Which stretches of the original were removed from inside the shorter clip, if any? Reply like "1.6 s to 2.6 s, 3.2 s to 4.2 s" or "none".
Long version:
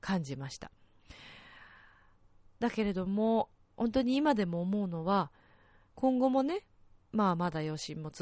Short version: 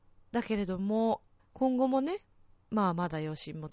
3.7 s to 5.8 s